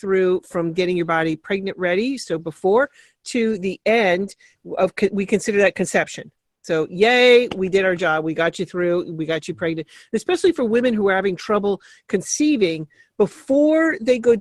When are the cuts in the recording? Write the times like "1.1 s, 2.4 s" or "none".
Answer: 7.5 s